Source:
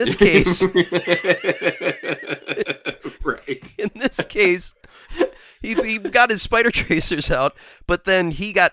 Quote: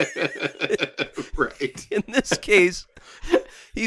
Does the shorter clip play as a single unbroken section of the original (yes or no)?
yes